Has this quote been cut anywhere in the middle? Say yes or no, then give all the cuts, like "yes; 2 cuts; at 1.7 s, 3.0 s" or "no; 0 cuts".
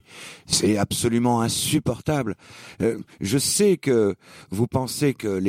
no; 0 cuts